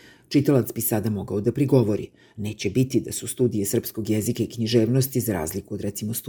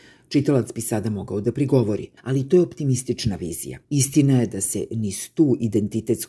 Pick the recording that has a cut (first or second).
second